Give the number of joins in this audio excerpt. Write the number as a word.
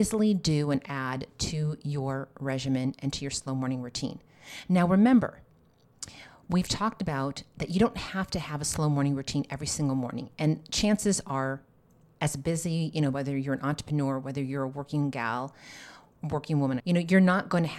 two